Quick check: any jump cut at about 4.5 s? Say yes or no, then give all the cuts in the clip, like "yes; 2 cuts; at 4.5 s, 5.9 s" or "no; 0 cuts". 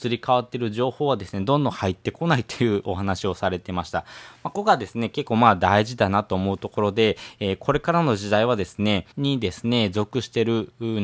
yes; 2 cuts; at 4.5 s, 9.1 s